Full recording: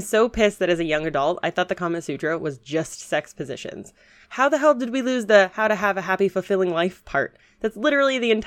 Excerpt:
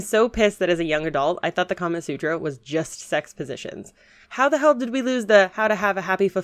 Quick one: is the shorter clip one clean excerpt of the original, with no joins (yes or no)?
yes